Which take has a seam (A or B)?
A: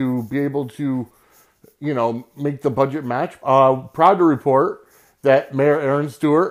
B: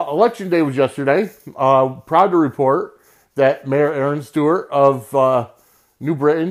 A